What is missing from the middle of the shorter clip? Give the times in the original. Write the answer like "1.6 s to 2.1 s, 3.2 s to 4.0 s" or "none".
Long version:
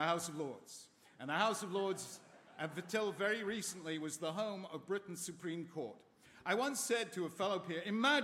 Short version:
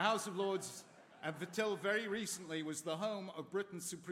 none